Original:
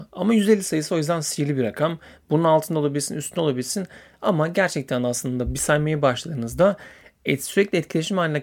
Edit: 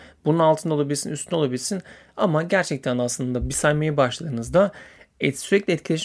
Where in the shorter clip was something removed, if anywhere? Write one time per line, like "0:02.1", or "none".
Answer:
none